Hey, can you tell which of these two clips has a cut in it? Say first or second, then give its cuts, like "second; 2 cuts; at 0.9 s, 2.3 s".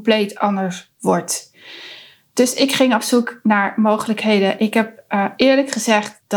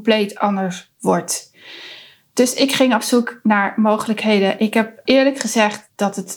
second; 1 cut; at 5.0 s